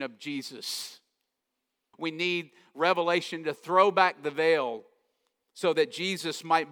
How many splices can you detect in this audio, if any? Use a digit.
1